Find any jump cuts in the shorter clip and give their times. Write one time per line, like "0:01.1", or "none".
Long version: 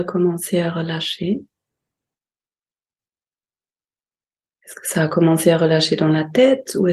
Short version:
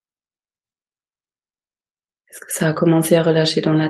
none

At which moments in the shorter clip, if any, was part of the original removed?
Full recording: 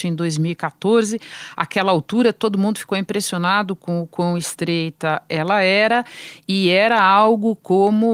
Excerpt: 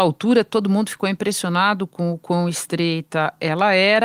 none

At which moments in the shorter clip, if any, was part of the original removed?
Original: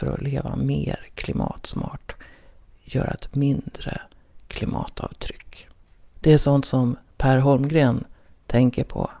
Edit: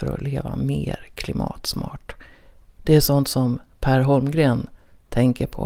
0:02.7

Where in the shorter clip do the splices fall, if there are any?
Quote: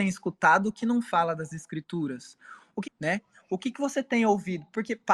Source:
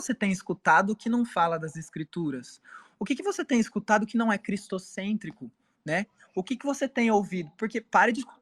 0:02.8

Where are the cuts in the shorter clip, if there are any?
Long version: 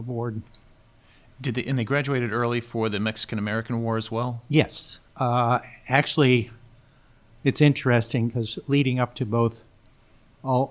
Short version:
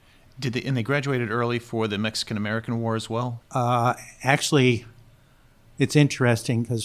0:03.4

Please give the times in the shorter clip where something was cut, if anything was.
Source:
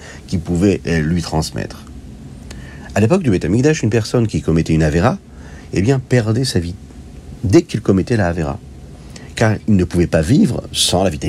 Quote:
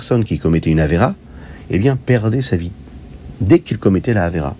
none

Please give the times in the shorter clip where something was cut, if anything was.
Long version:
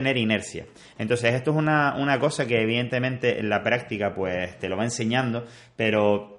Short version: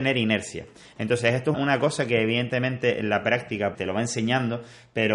0:01.5
0:03.7

